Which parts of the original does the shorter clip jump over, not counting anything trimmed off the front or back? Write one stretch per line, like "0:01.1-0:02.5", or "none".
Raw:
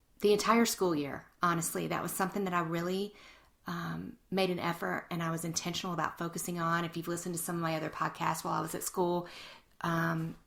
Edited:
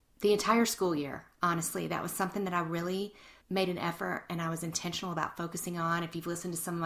0:03.4-0:04.2